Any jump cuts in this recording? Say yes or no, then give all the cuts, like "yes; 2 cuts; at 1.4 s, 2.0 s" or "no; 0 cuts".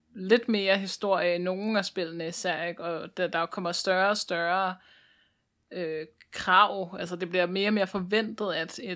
no; 0 cuts